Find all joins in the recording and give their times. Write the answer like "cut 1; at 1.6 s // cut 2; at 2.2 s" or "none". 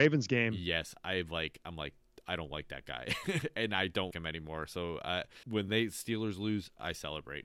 cut 1; at 4.1 s // cut 2; at 5.4 s